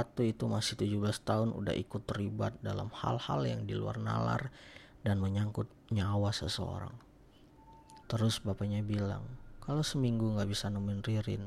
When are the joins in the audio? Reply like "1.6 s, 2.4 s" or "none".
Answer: 8.0 s